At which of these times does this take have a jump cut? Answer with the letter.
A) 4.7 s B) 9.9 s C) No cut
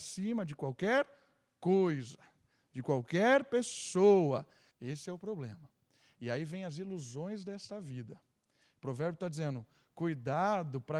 A